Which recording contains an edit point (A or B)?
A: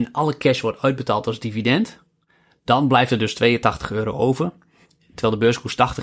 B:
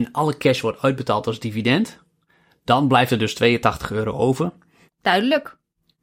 B